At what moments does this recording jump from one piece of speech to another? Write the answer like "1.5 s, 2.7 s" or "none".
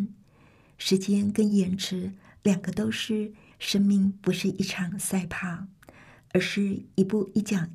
3.5 s